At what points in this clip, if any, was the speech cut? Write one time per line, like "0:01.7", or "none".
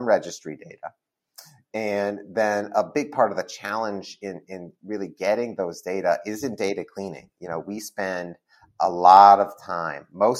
none